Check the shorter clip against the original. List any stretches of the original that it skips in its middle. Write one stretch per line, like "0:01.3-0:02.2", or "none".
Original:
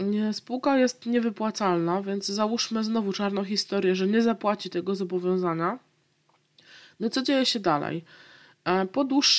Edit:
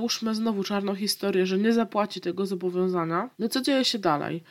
0:05.8-0:07.0